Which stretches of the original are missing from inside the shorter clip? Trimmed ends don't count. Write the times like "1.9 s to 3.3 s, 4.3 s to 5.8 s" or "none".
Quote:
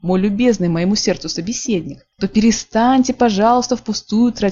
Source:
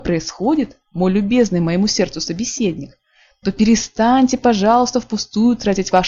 3.0 s to 3.4 s